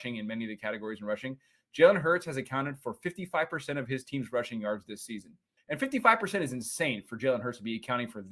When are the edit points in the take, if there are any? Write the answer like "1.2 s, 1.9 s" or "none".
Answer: 5.6 s